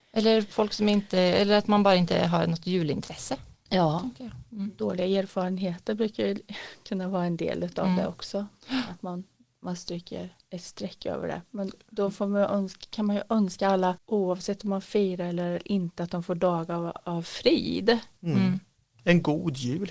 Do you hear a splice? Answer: no; 0 cuts

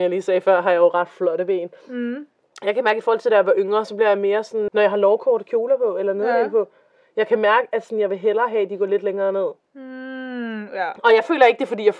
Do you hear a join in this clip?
yes; 1 cut; at 4.7 s

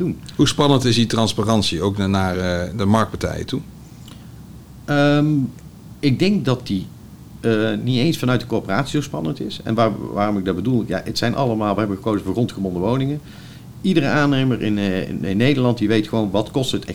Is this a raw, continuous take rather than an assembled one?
yes; 0 cuts

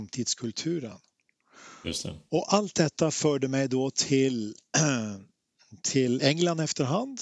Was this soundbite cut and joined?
no; 0 cuts

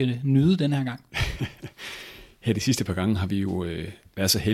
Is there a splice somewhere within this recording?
no; 0 cuts

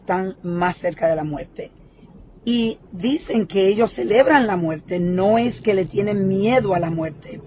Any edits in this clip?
no; 0 cuts

